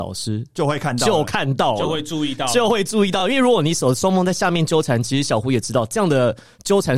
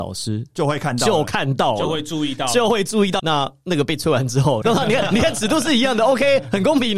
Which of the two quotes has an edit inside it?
second; 2 cuts; at 3.2 s, 4.6 s

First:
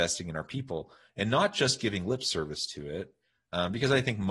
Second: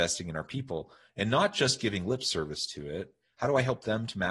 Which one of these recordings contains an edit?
second; 1 cut; at 3.3 s

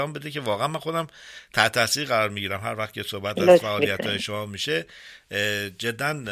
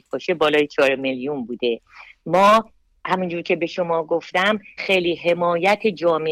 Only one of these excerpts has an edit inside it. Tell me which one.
second; 1 cut; at 4.8 s

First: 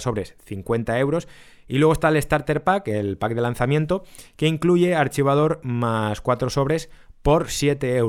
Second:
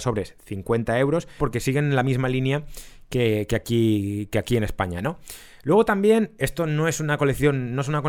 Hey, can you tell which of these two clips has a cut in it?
second; 1 cut; at 1.4 s

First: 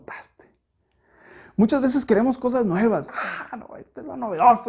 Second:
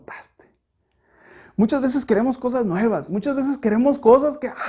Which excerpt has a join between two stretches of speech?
first; 1 cut; at 3.1 s

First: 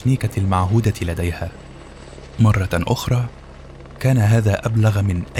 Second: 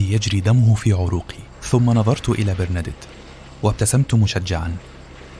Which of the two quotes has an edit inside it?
second; 1 cut; at 1.5 s

